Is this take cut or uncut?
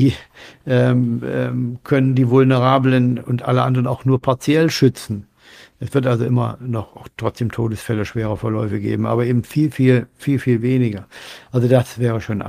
uncut